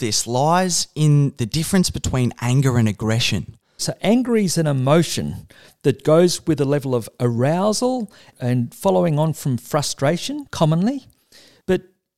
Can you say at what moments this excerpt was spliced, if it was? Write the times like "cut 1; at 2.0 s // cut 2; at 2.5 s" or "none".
cut 1; at 3.8 s